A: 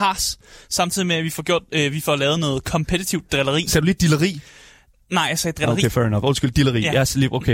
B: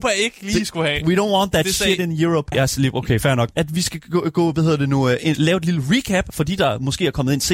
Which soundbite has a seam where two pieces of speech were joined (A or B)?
B